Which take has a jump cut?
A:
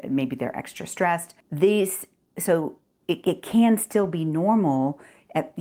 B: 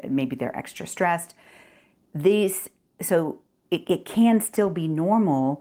A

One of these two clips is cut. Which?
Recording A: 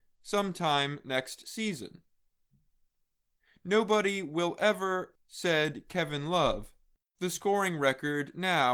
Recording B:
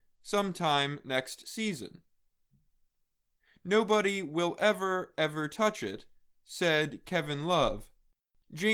A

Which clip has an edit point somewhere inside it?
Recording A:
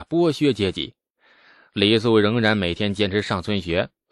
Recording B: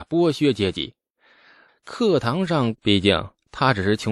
B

